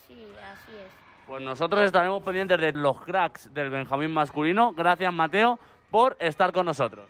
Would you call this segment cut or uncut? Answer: cut